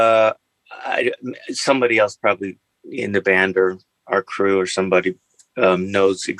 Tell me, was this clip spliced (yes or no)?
no